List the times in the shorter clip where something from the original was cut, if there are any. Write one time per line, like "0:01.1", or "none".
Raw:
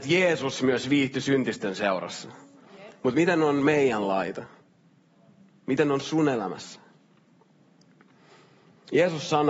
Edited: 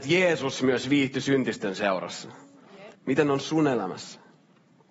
0:02.9